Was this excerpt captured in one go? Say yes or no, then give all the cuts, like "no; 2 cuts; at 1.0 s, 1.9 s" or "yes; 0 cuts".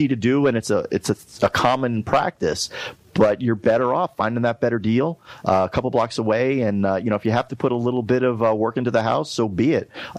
yes; 0 cuts